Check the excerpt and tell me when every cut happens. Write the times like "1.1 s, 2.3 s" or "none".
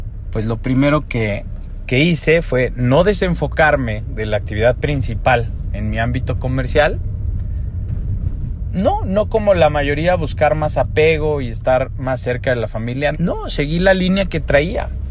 13.1 s